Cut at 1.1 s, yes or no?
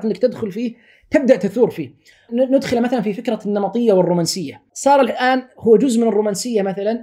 no